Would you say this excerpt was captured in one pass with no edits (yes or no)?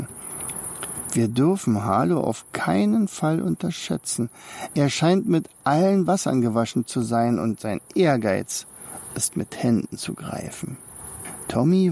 yes